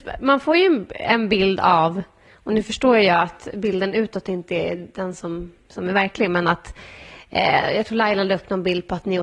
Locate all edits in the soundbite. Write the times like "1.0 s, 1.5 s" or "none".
none